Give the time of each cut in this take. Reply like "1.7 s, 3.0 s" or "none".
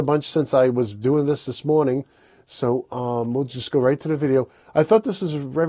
none